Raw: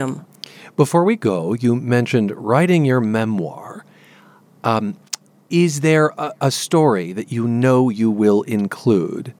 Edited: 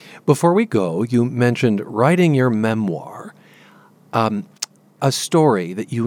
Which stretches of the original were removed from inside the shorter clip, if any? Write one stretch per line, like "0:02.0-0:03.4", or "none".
0:05.5-0:06.4